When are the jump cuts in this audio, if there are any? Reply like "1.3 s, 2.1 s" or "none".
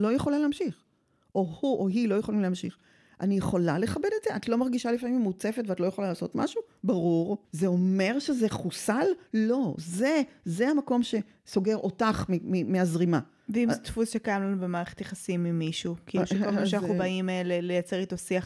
7.4 s